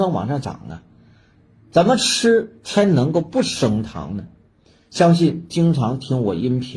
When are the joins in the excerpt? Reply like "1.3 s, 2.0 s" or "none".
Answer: none